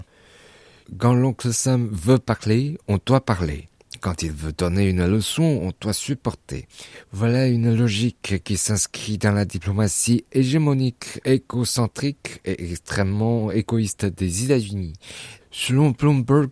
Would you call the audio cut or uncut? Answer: cut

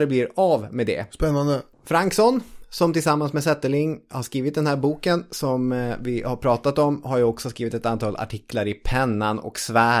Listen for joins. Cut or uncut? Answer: uncut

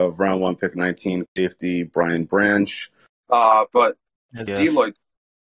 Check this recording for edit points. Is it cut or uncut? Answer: cut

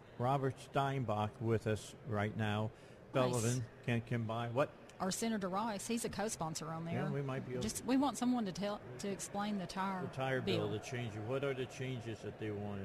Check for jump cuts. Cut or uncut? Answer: cut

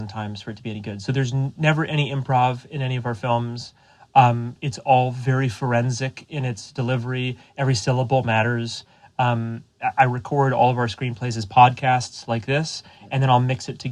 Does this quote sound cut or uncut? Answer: uncut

